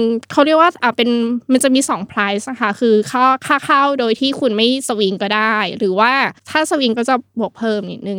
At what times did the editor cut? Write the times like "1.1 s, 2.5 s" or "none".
6.4 s